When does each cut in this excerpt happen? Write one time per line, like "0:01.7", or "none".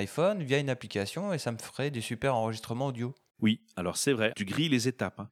0:04.3